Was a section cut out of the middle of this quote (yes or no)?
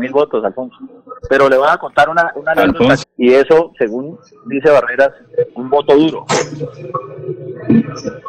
yes